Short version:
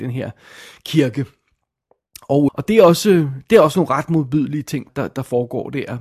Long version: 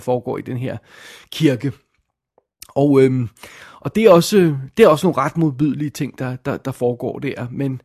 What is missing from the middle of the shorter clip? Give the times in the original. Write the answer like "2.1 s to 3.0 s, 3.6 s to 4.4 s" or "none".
2.9 s to 3.8 s, 6.2 s to 6.4 s